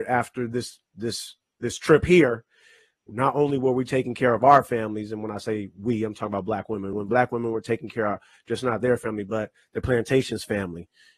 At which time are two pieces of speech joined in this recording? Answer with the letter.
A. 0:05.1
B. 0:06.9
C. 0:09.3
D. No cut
D